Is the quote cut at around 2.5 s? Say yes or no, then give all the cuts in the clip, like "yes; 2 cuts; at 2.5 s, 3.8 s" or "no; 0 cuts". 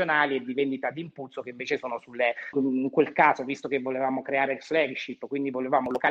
yes; 1 cut; at 2.5 s